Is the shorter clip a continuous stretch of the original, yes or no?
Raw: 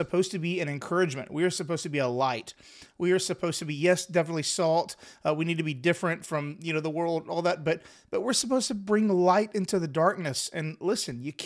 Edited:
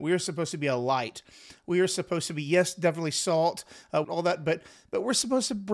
no